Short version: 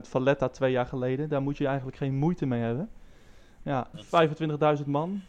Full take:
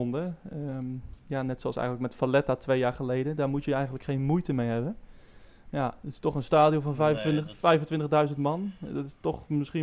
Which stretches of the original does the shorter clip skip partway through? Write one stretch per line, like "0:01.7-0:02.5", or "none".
0:06.0-0:07.4